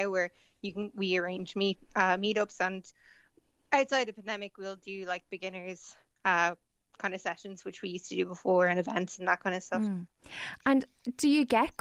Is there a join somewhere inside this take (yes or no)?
no